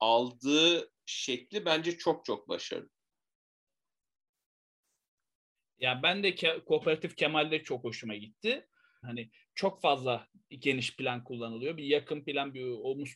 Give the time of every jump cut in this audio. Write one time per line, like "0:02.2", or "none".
0:09.0

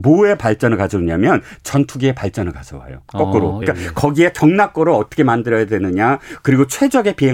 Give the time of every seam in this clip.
0:03.6

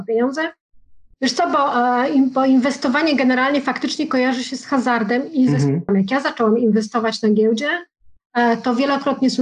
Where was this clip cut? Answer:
0:01.1
0:05.9

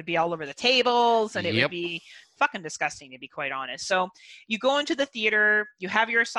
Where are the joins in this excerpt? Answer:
none

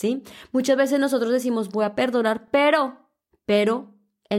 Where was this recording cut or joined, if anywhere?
none

